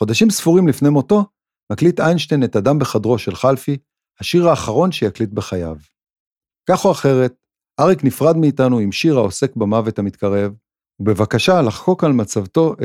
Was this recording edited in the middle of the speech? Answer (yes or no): yes